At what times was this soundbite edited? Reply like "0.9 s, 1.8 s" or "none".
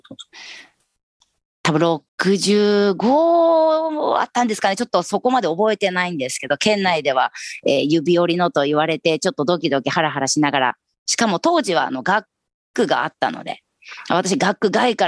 2.1 s